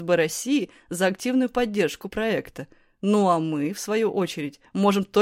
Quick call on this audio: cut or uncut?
uncut